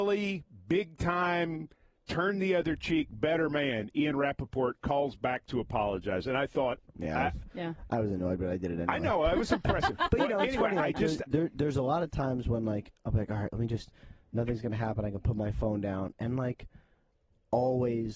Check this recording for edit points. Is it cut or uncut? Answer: uncut